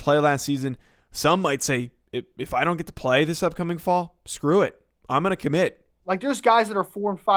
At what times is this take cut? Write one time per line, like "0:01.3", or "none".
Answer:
0:06.0